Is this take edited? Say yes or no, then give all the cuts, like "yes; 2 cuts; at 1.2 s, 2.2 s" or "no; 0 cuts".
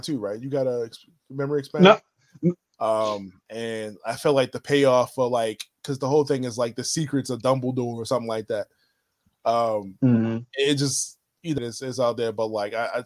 yes; 2 cuts; at 2.7 s, 11.6 s